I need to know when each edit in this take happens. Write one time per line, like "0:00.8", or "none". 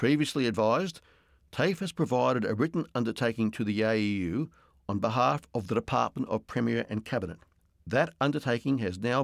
none